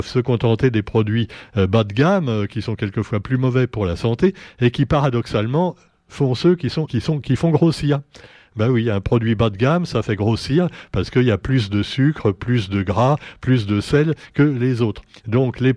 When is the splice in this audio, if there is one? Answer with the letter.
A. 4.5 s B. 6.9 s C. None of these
B